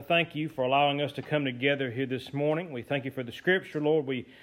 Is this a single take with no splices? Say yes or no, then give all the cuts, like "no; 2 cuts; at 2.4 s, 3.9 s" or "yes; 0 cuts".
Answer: yes; 0 cuts